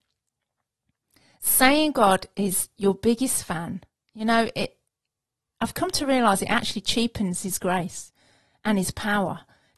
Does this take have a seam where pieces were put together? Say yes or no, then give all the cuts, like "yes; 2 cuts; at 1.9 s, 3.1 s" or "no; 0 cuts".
no; 0 cuts